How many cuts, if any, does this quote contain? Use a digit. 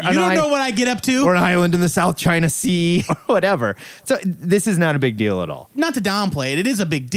1